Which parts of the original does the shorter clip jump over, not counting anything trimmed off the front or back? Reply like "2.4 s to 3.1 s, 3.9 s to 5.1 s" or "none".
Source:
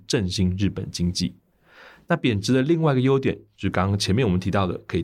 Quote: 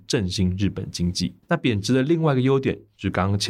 1.4 s to 2.0 s